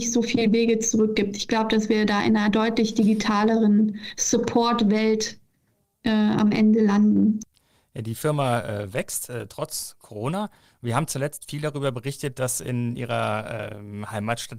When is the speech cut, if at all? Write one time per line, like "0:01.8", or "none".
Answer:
none